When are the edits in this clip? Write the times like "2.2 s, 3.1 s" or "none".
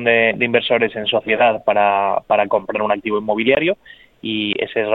none